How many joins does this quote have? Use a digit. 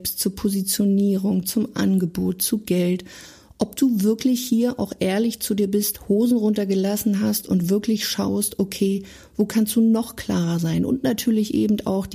0